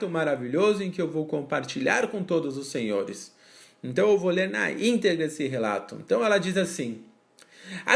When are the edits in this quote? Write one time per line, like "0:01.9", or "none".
none